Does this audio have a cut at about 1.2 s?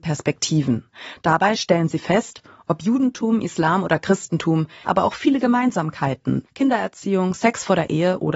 no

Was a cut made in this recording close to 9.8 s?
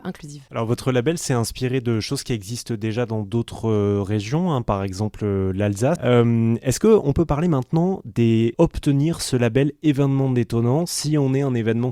no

